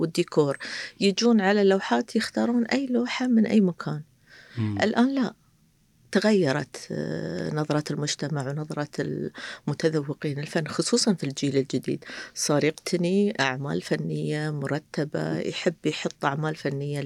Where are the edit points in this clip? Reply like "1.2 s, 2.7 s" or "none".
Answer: none